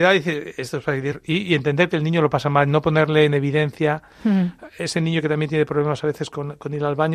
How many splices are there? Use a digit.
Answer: 1